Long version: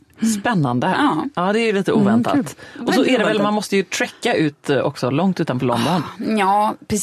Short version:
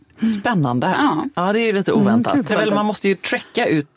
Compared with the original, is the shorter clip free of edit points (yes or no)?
no